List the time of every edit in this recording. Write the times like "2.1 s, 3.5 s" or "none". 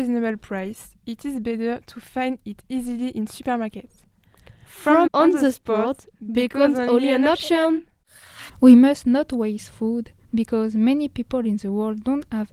5.1 s, 8.5 s